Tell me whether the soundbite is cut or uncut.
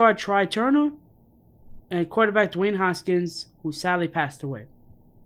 cut